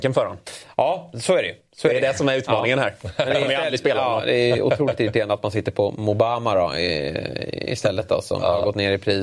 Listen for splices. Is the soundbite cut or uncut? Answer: uncut